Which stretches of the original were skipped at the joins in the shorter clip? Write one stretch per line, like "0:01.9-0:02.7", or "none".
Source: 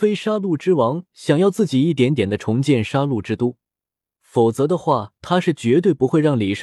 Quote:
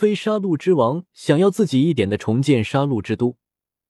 0:02.0-0:02.2